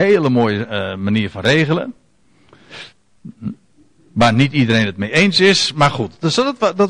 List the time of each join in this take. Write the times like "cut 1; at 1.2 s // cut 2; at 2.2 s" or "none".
none